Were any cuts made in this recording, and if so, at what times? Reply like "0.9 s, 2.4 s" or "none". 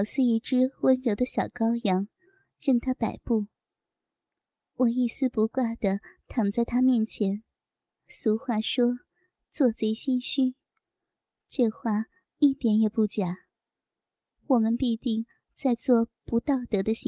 7.9 s